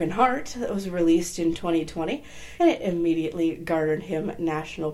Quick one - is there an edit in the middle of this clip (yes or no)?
yes